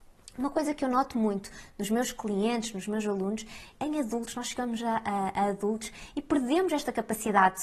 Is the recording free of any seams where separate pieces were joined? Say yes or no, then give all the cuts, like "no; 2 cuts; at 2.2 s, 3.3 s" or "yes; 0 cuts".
no; 1 cut; at 3.7 s